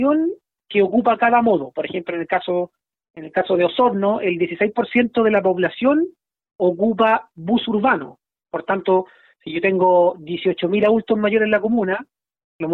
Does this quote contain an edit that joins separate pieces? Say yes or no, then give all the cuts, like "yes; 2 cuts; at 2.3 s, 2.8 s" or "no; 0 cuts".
no; 0 cuts